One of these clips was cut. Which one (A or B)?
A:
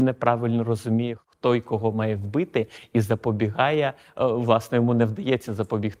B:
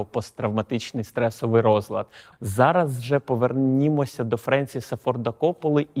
B